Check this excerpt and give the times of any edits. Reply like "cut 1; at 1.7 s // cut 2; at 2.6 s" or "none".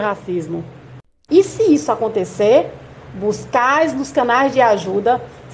cut 1; at 1.3 s